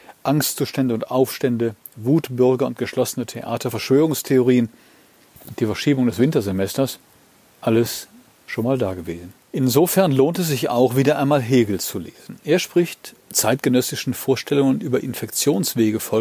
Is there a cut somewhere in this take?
no; 0 cuts

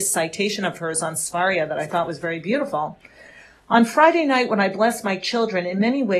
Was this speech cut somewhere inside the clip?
no; 0 cuts

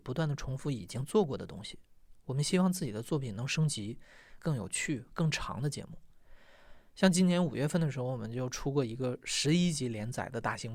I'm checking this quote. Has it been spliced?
yes; 1 cut; at 4.4 s

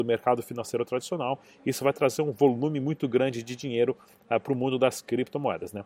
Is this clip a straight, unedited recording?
yes; 0 cuts

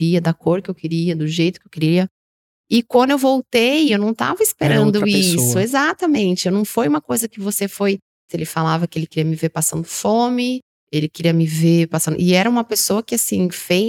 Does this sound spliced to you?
yes; 1 cut; at 8.3 s

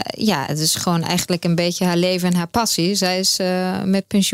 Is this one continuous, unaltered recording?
yes; 0 cuts

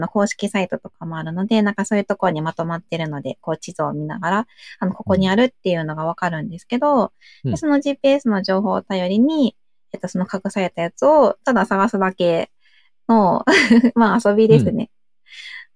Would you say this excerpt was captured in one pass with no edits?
yes; 0 cuts

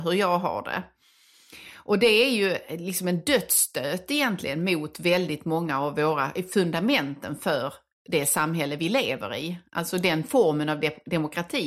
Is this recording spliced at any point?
no; 0 cuts

